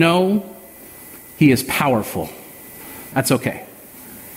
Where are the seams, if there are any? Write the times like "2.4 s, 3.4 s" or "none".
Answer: 3.1 s